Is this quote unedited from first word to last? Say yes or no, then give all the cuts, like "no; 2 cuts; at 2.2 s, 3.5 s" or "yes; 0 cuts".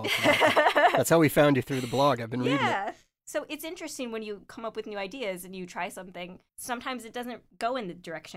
no; 2 cuts; at 3.2 s, 6.5 s